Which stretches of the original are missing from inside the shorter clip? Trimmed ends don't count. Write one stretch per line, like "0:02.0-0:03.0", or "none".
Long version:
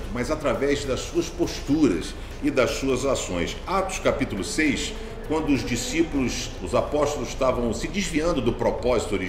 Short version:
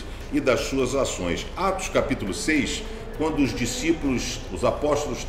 none